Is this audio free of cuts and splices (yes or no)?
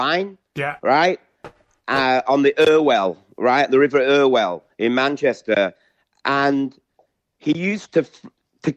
yes